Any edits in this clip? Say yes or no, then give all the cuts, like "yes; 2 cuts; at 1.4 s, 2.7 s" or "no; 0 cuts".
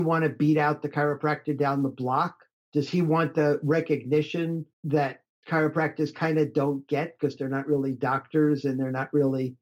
yes; 1 cut; at 4.7 s